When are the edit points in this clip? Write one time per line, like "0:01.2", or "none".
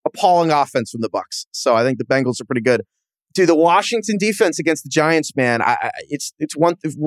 none

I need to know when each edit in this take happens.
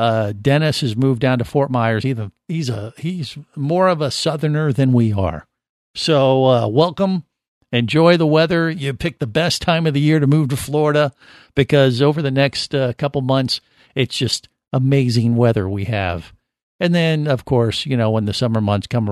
none

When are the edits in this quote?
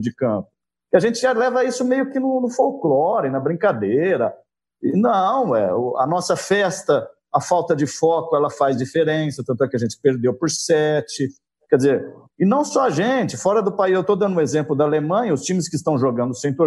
none

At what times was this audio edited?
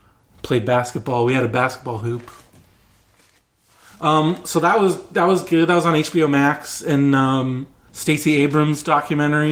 0:07.9

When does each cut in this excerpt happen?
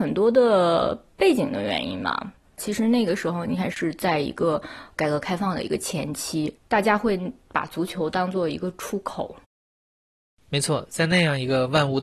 0:06.6

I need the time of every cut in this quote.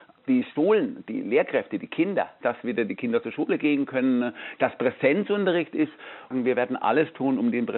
0:02.4

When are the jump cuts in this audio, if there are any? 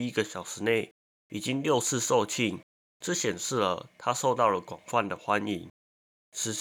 0:02.9

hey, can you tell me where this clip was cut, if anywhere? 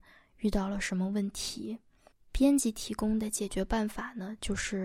0:02.1

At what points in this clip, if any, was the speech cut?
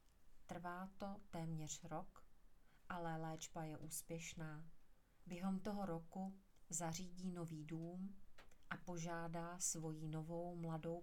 none

